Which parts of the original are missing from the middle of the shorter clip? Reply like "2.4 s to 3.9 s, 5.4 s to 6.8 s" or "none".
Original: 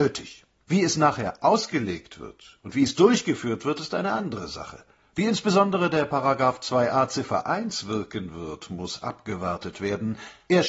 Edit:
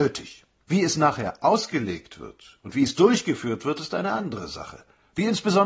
none